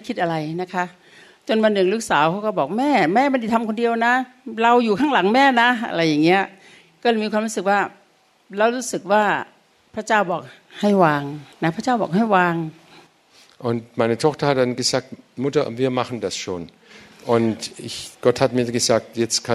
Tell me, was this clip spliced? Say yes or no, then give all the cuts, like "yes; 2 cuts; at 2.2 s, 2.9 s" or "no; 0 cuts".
yes; 1 cut; at 11.5 s